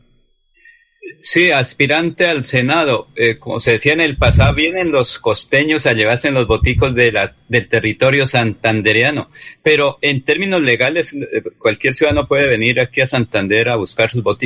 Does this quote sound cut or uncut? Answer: uncut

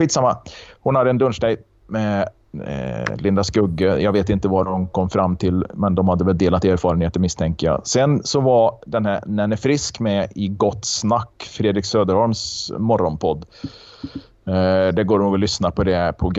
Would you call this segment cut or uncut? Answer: uncut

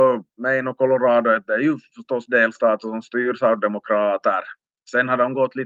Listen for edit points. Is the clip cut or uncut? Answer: uncut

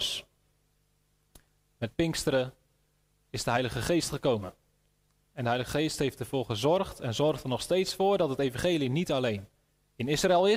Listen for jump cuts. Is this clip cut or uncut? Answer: uncut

